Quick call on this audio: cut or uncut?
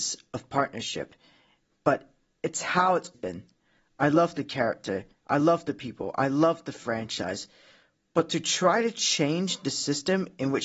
cut